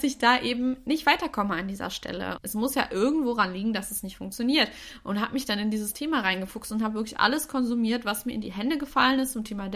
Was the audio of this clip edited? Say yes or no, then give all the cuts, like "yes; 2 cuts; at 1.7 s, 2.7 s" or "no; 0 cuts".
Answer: yes; 1 cut; at 2.3 s